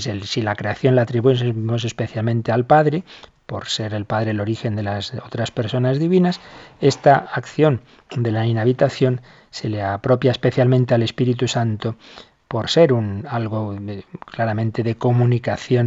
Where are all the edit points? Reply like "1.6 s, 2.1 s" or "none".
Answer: 12.4 s